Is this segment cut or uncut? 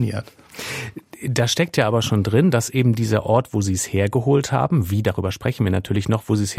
uncut